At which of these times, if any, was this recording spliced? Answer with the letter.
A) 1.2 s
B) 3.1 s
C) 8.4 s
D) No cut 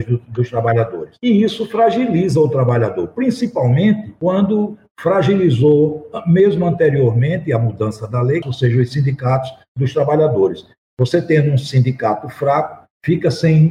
C